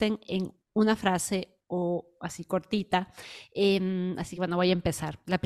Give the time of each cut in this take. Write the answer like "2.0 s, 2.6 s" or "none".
none